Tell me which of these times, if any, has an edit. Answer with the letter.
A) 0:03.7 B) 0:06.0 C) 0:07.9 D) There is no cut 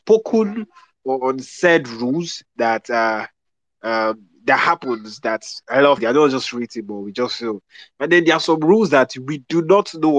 B